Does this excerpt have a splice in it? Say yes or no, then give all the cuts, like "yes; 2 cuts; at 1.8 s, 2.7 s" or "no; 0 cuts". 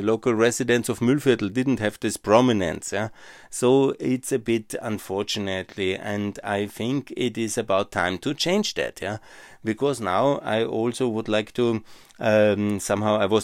no; 0 cuts